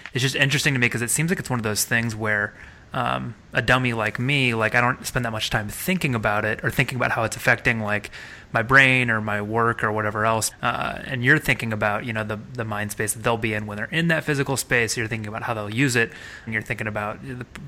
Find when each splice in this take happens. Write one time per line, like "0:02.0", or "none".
0:10.5
0:16.5